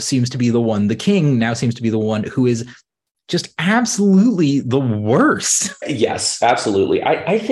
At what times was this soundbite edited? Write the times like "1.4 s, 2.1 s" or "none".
5.8 s